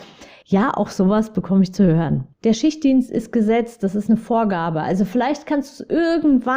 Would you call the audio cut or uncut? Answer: cut